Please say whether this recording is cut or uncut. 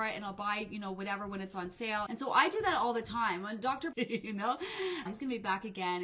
cut